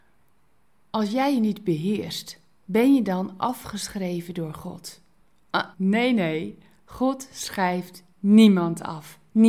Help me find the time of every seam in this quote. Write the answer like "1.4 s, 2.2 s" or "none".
5.7 s

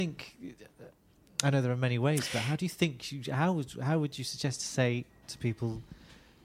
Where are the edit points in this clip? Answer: none

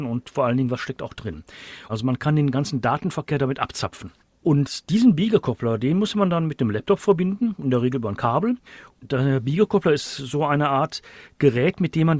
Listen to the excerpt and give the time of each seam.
1.9 s, 8.9 s

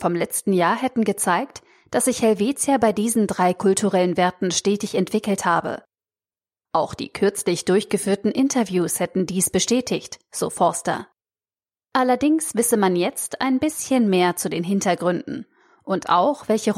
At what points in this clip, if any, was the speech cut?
none

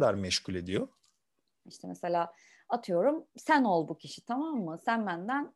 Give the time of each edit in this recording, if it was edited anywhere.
1.6 s

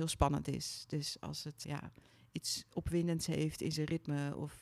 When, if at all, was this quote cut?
1.6 s

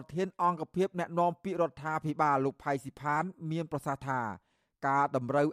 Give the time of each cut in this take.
none

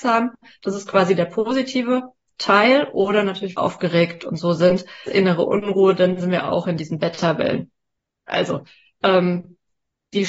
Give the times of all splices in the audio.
3.5 s, 5.1 s, 8.3 s

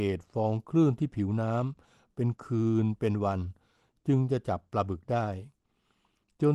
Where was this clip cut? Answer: none

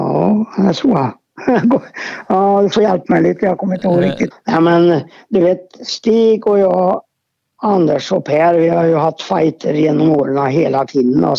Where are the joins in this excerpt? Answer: 4.3 s

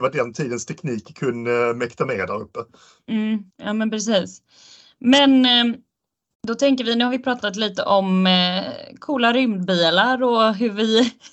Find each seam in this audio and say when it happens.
3.5 s

